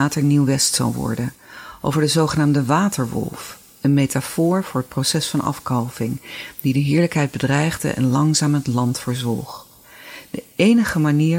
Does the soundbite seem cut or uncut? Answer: uncut